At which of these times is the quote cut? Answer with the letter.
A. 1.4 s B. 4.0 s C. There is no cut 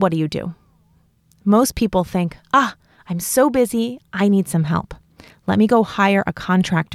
B